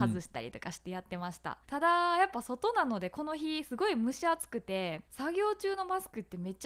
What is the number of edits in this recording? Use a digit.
2